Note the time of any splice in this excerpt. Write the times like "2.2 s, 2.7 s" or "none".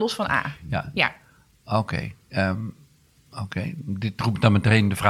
none